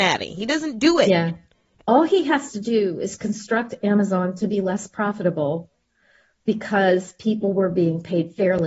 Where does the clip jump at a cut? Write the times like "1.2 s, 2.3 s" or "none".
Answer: 1.8 s